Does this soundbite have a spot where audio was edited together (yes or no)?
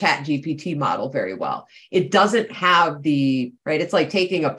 yes